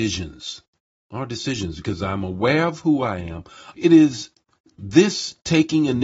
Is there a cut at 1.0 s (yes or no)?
no